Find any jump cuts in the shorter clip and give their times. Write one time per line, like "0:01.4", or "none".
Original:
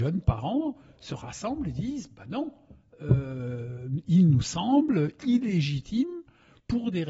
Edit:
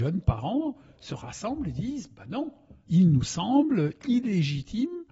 0:02.9